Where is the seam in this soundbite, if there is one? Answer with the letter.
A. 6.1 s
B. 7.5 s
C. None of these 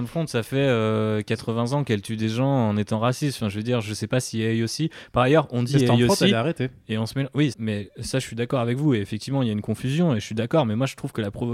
B